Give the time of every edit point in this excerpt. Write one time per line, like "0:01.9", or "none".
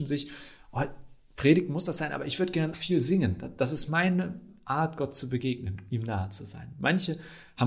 0:02.7